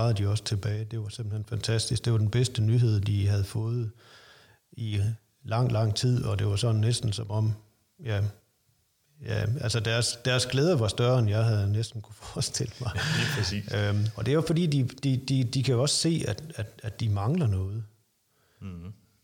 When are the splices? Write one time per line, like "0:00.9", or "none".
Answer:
none

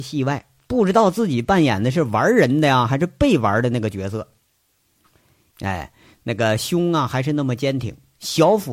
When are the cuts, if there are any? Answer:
0:05.5

